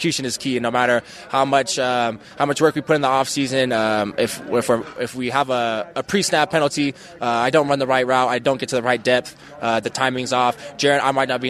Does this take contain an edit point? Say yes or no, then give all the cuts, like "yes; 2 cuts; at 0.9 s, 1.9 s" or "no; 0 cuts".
yes; 1 cut; at 9.8 s